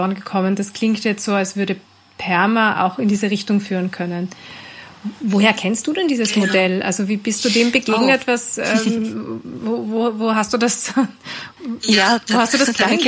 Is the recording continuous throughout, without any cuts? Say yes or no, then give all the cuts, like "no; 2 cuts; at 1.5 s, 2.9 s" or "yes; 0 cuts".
yes; 0 cuts